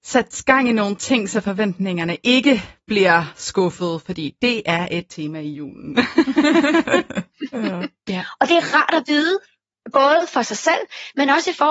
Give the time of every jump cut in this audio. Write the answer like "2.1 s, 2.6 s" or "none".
8.1 s